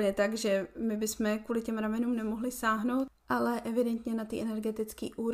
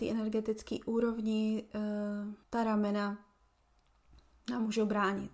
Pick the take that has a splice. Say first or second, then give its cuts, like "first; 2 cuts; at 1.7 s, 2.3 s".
second; 1 cut; at 2.4 s